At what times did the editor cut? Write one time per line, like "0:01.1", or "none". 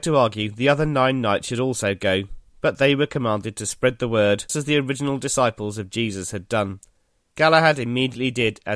0:04.5
0:07.3